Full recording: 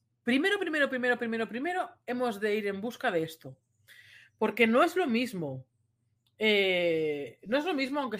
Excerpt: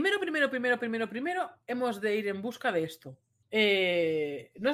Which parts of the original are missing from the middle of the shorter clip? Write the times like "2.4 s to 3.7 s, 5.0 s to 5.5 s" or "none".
3.8 s to 6.3 s